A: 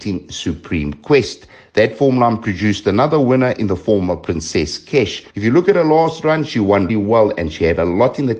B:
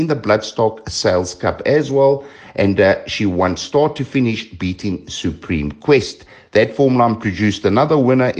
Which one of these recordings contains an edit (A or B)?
A